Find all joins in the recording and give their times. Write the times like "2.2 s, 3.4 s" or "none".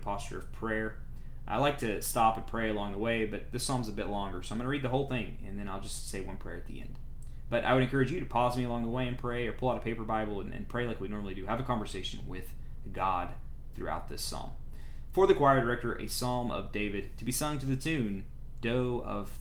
none